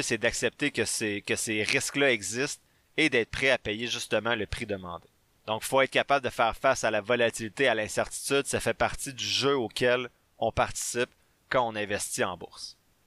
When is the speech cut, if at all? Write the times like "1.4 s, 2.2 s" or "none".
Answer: none

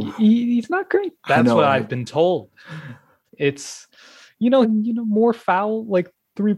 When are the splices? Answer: 1.2 s, 3.3 s, 4.6 s

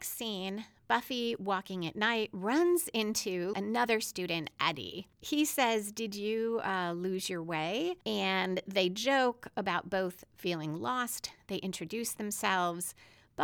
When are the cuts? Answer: 3.5 s, 8.0 s

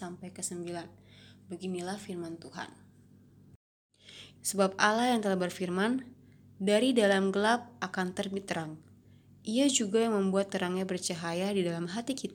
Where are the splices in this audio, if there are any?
4.3 s

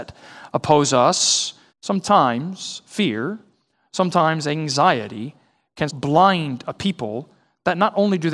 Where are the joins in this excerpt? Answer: 1.7 s, 5.9 s

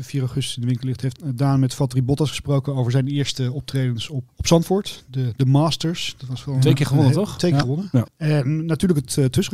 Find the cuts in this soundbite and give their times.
1.2 s, 4.3 s, 8.1 s

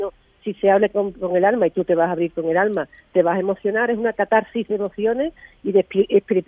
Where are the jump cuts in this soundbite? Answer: none

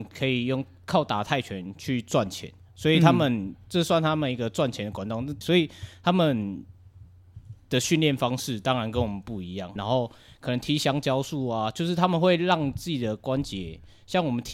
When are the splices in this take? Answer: 5.4 s, 9.8 s

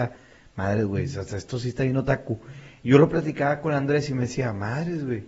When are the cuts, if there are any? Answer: none

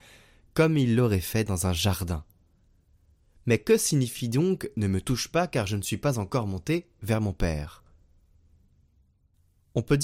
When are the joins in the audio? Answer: none

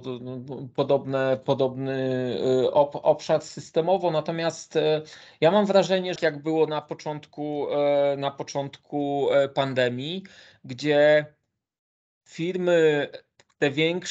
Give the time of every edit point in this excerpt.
6.2 s

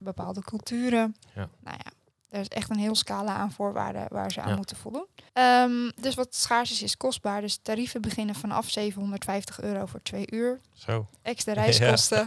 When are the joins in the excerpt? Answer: 5.3 s

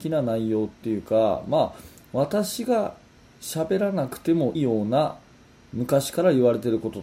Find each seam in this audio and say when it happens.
4.5 s

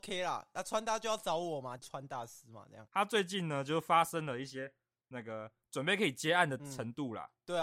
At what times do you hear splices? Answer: 1.8 s, 2.9 s

